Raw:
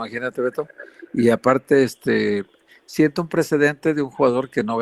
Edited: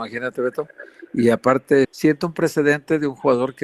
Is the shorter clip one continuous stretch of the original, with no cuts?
no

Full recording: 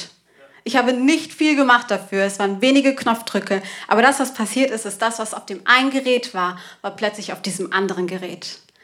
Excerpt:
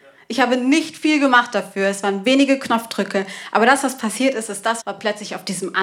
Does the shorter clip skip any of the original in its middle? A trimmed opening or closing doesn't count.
yes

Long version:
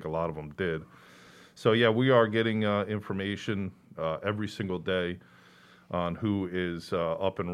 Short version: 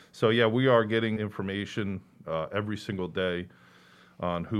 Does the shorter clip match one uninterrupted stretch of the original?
no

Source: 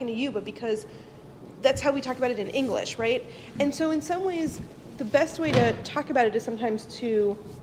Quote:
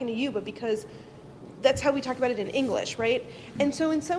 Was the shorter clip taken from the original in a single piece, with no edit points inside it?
yes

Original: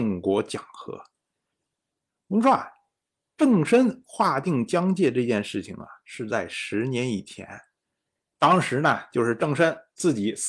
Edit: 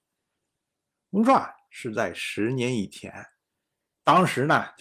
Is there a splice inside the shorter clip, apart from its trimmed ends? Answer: yes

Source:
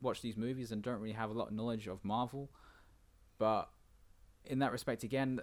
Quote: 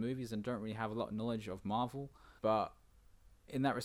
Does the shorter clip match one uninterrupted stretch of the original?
no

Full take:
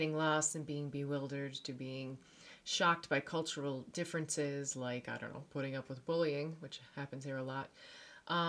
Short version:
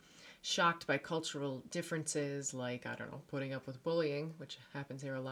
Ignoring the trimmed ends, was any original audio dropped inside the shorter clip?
no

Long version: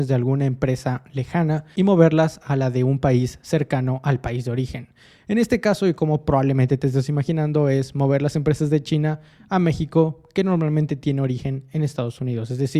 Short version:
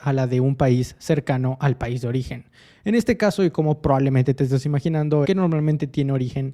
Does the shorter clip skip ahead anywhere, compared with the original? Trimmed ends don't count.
yes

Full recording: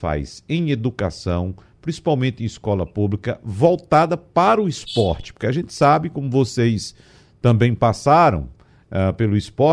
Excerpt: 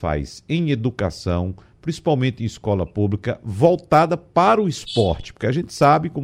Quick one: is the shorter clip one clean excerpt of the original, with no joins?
yes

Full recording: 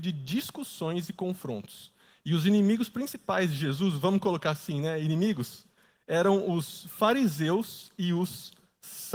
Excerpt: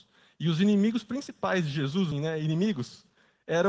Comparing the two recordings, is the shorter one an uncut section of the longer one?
no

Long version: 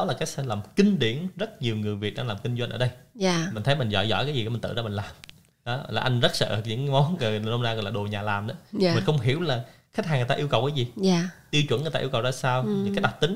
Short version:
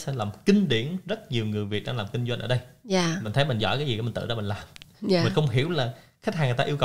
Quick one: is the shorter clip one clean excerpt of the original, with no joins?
no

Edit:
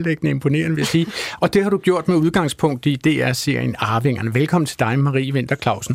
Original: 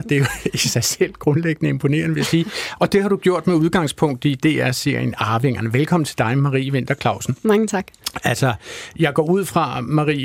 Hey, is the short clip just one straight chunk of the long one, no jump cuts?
yes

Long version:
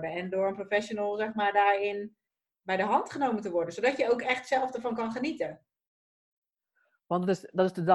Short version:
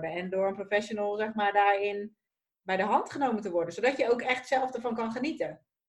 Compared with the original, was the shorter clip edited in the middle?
no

